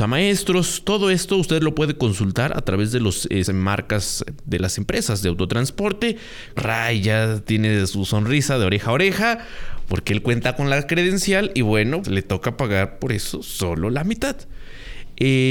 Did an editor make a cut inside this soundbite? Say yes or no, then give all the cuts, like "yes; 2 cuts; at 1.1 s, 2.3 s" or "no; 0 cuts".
yes; 3 cuts; at 3.5 s, 6.6 s, 12.0 s